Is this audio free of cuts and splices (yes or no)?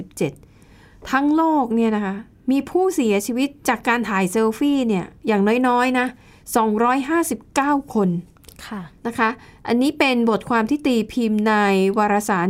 no